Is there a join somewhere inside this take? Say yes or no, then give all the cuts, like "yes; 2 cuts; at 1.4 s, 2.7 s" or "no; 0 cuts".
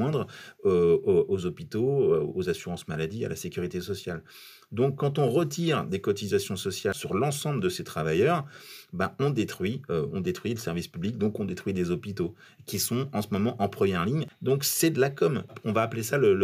no; 0 cuts